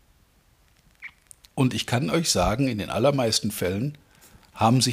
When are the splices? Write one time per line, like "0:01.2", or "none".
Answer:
0:01.5